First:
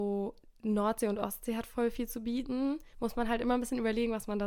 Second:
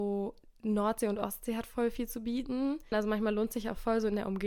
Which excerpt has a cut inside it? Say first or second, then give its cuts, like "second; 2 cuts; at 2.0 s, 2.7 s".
second; 1 cut; at 2.9 s